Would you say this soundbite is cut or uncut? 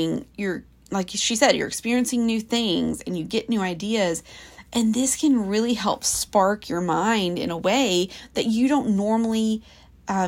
uncut